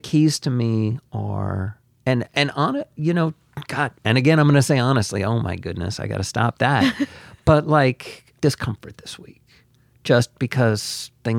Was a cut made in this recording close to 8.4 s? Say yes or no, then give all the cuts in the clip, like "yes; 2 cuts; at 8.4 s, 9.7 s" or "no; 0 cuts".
yes; 1 cut; at 8.4 s